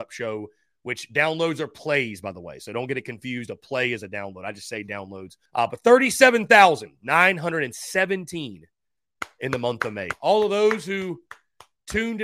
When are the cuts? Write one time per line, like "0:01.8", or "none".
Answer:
0:05.5
0:10.1